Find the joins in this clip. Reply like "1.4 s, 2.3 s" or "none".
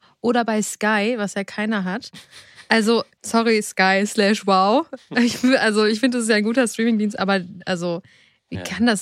none